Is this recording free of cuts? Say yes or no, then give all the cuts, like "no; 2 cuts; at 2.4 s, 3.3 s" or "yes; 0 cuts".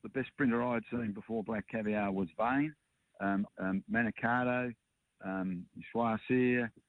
no; 1 cut; at 3.5 s